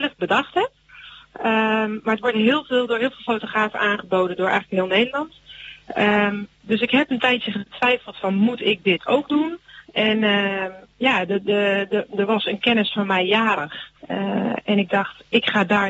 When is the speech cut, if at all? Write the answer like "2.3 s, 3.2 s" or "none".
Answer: 9.8 s, 14.0 s